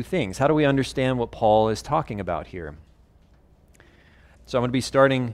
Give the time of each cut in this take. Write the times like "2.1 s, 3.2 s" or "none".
4.3 s